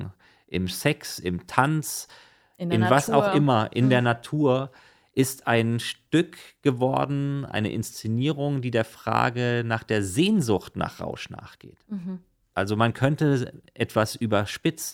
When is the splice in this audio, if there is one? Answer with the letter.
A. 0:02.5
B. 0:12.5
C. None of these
B